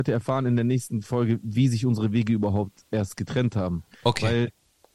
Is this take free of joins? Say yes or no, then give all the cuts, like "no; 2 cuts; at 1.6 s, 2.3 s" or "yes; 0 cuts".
yes; 0 cuts